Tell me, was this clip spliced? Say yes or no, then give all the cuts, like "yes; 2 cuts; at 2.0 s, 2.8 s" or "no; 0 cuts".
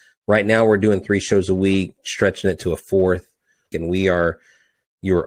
yes; 1 cut; at 3.7 s